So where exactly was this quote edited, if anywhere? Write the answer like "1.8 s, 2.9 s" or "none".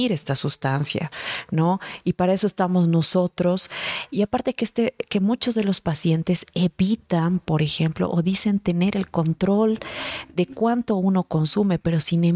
none